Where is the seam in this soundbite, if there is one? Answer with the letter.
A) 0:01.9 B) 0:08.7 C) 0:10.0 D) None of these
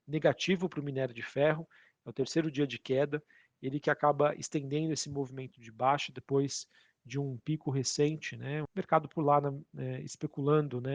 B